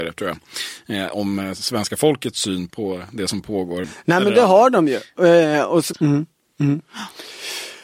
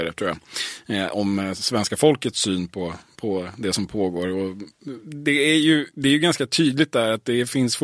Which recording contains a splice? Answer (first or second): first